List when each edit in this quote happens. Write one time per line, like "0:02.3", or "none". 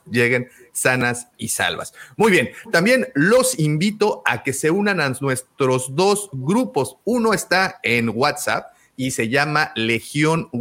none